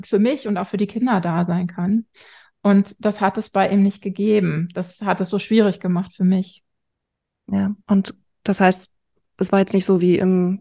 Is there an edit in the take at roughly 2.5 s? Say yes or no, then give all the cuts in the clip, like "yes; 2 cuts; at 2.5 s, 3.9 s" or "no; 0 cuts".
no; 1 cut; at 7.8 s